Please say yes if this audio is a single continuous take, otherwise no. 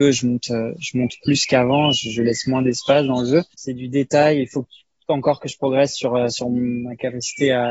no